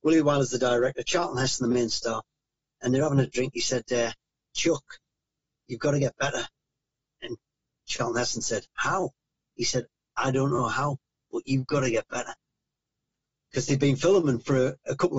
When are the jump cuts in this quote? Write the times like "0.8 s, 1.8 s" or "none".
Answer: none